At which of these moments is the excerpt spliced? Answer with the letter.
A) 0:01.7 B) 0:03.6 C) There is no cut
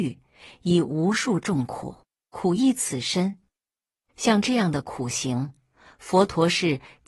C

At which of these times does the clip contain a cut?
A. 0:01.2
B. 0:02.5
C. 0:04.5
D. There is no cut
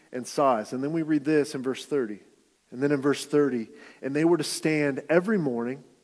B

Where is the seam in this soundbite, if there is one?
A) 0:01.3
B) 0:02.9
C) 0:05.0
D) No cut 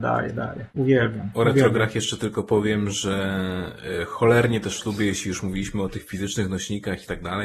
D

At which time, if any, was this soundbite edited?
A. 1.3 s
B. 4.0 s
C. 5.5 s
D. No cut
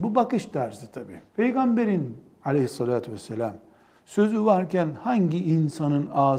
A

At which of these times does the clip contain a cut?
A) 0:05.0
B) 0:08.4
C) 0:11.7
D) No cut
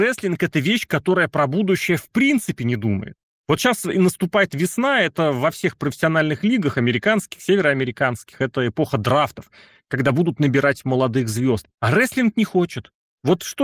C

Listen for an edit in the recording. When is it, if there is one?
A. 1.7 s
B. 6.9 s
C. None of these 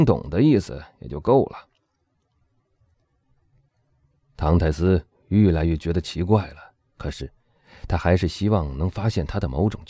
B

